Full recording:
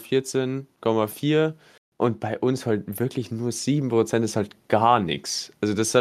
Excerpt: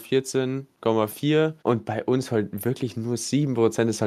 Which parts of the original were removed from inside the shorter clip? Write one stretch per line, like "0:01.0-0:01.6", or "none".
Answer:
0:01.6-0:01.9